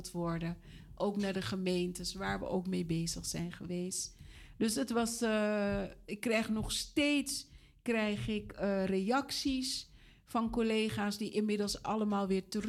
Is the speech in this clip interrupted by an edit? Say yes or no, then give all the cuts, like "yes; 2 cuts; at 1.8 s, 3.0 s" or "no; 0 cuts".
no; 0 cuts